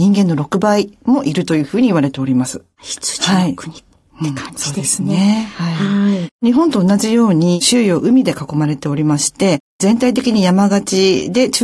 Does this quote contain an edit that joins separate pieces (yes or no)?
no